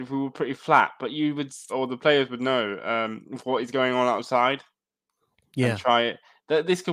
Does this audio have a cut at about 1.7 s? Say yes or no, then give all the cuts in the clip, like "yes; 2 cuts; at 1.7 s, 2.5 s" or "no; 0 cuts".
yes; 1 cut; at 1.7 s